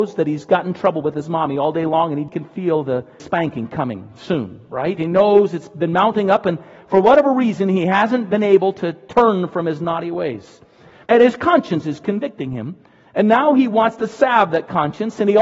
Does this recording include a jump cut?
no; 0 cuts

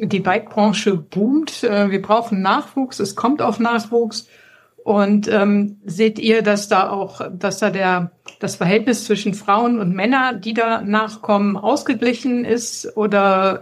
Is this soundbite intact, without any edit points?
yes; 0 cuts

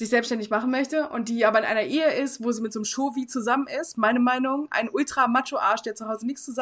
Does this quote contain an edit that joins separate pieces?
no; 0 cuts

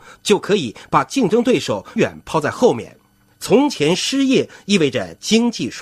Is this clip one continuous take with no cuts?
no; 2 cuts; at 2.0 s, 3.3 s

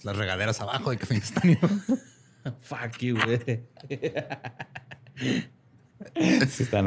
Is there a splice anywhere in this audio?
no; 0 cuts

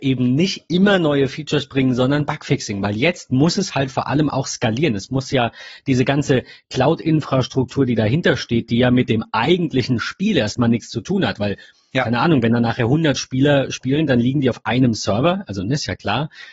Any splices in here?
no; 0 cuts

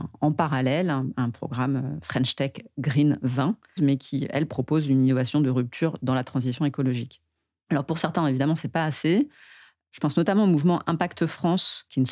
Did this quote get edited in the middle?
yes; 1 cut; at 3.8 s

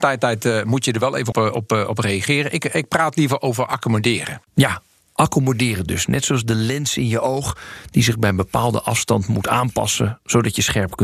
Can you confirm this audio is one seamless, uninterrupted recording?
no; 1 cut; at 1.3 s

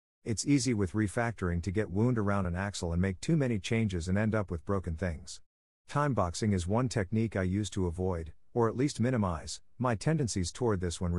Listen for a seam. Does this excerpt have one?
no; 0 cuts

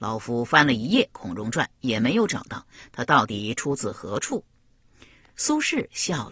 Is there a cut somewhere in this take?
no; 0 cuts

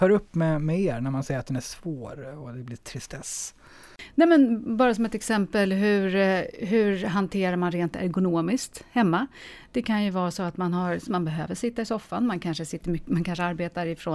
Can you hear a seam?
yes; 1 cut; at 11.1 s

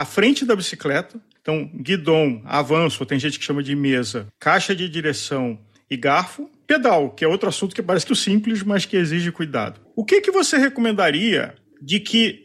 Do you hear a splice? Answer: yes; 2 cuts; at 8.1 s, 9.8 s

